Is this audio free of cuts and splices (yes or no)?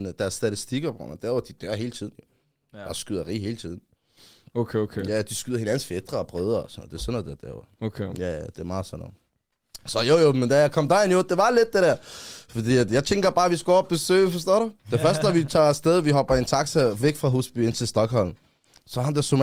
no